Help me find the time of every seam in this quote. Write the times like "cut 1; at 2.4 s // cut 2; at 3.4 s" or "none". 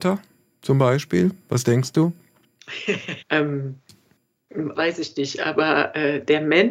cut 1; at 3.2 s // cut 2; at 4.7 s

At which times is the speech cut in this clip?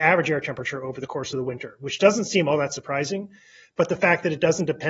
none

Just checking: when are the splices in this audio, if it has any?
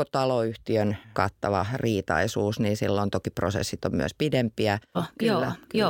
cut 1; at 4.9 s

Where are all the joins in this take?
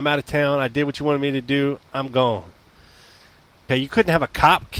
cut 1; at 3.7 s

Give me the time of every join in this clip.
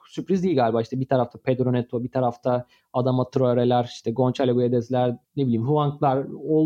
cut 1; at 5.2 s

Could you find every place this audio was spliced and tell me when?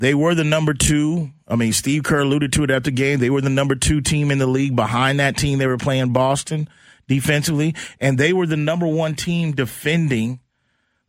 none

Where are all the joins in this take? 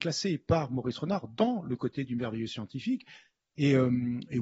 none

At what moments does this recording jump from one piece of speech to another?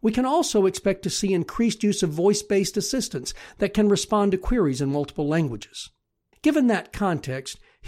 cut 1; at 6.3 s

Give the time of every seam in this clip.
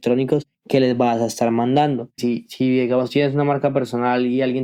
cut 1; at 2.2 s

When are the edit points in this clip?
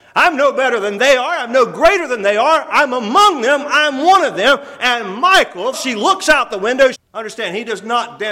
cut 1; at 5.7 s // cut 2; at 6.9 s

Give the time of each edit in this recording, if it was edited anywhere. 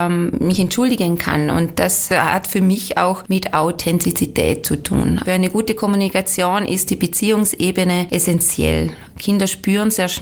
cut 1; at 5.2 s

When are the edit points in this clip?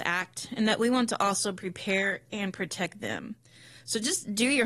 none

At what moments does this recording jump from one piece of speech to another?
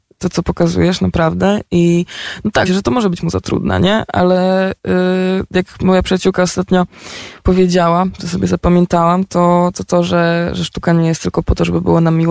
cut 1; at 2.6 s

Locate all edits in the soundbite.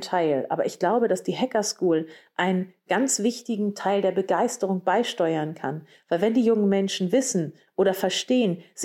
none

